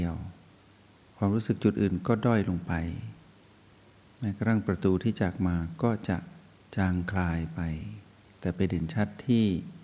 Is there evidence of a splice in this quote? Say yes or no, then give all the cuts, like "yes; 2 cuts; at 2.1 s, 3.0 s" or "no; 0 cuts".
no; 0 cuts